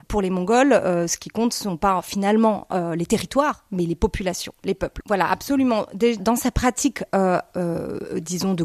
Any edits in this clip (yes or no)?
yes